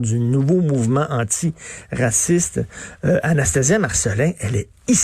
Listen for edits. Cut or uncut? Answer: uncut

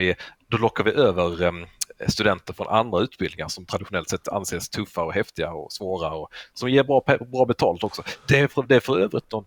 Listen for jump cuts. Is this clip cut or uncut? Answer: uncut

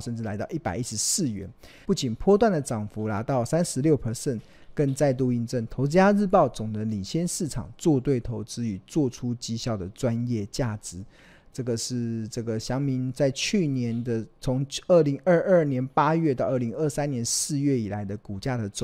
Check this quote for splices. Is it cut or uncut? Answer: cut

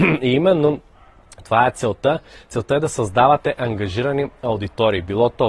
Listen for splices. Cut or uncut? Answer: uncut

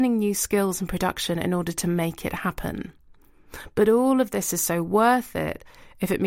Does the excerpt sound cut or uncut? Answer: uncut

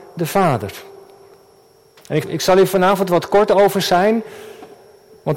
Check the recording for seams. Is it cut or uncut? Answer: cut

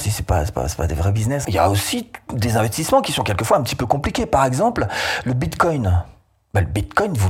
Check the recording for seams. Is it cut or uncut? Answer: cut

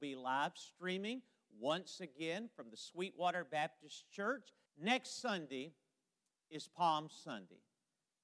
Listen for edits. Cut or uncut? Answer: cut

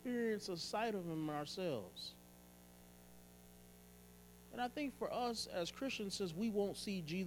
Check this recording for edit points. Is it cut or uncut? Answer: uncut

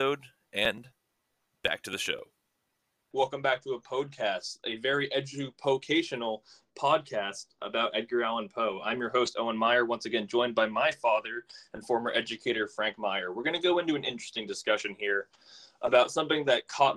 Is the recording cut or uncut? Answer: cut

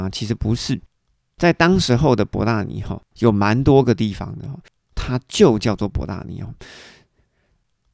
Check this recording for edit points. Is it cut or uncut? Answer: cut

